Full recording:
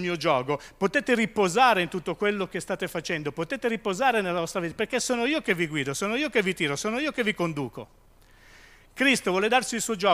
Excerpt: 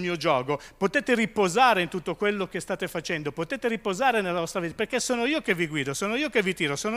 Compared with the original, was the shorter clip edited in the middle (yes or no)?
no